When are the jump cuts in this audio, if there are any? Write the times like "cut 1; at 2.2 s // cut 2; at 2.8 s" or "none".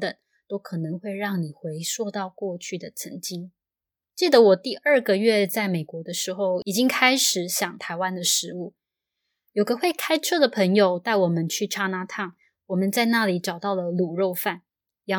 none